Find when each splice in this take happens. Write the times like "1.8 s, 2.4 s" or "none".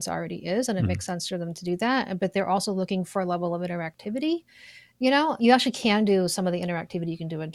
5.4 s